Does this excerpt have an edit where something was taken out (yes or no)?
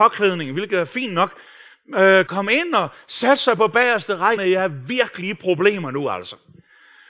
yes